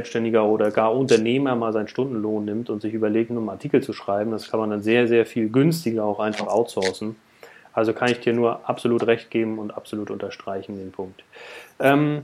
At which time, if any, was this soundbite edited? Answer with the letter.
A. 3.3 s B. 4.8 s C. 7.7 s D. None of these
A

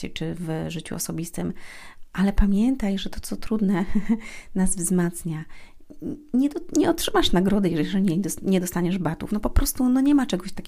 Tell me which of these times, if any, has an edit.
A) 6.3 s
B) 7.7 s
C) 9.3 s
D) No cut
D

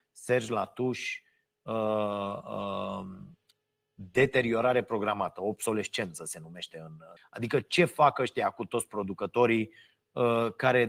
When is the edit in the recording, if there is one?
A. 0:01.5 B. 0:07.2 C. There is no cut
B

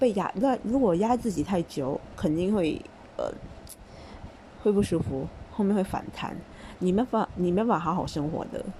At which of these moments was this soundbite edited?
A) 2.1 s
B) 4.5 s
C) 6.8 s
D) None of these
C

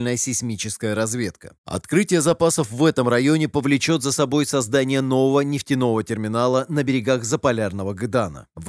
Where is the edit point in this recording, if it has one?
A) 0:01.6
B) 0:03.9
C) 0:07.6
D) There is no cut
A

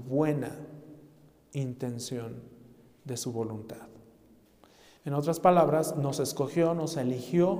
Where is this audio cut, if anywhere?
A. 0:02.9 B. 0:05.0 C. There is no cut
B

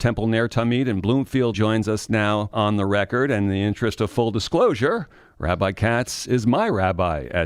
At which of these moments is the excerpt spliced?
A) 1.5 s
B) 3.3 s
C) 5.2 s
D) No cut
A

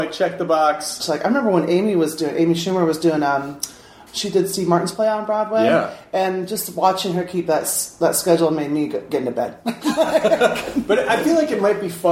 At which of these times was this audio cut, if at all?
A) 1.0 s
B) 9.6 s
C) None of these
A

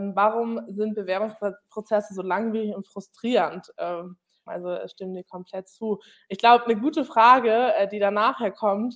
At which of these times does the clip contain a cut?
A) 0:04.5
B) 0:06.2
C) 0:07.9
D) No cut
A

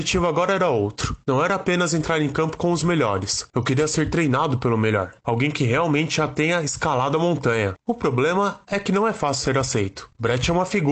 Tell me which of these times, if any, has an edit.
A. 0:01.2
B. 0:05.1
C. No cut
C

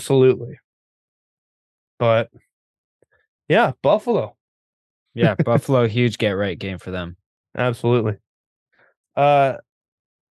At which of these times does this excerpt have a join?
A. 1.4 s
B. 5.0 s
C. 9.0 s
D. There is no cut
C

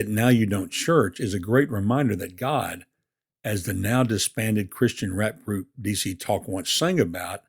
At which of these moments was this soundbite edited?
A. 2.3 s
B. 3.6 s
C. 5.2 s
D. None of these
D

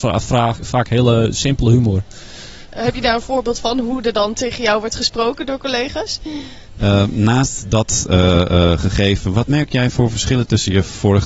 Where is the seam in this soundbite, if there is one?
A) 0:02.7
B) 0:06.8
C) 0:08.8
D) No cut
B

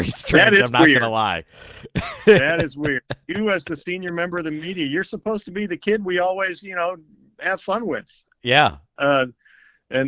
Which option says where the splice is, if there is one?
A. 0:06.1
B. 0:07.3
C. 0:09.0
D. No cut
C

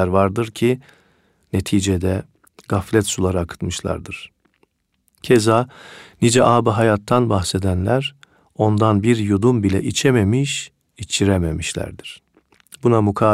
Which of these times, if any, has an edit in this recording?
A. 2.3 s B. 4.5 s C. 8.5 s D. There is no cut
D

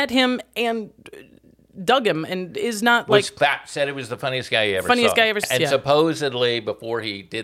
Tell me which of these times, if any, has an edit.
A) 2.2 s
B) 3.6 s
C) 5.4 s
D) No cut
C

